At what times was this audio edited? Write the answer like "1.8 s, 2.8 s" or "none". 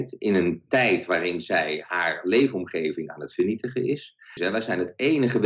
4.4 s